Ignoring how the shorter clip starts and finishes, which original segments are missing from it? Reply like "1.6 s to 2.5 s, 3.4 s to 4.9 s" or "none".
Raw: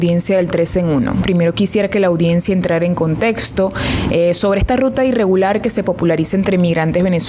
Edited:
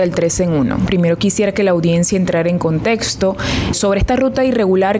4.1 s to 4.3 s